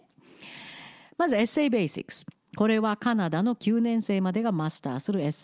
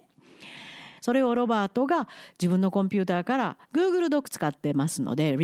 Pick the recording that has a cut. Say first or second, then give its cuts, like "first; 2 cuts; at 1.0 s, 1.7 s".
second; 1 cut; at 1.0 s